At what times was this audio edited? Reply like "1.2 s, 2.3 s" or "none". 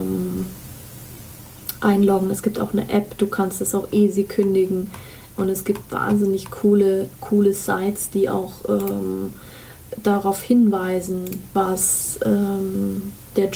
none